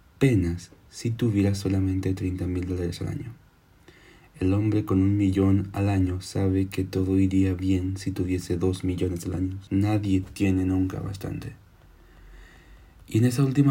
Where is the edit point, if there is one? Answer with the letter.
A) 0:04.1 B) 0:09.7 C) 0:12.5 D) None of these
B